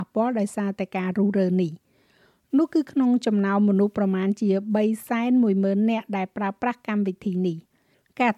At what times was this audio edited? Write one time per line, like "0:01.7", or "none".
none